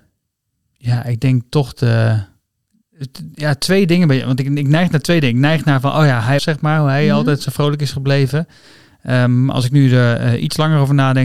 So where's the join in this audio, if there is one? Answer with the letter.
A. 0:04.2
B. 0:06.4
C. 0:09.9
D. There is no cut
B